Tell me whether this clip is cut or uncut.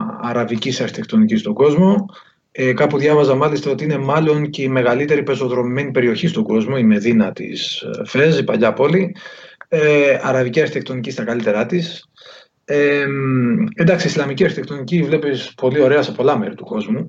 uncut